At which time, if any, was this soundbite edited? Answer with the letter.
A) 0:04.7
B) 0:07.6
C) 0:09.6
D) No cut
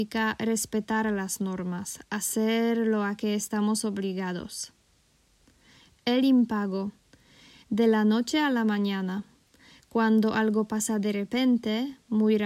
B